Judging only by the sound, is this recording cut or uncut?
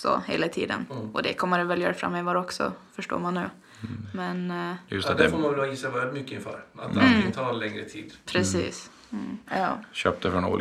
cut